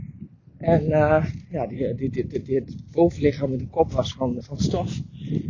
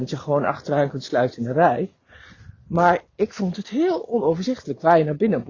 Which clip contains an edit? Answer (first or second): first